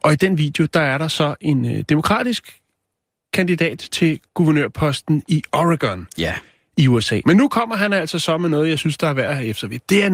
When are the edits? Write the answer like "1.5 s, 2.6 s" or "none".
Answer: 4.3 s, 7.2 s